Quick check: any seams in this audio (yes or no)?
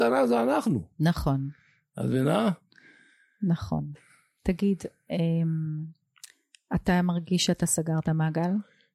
no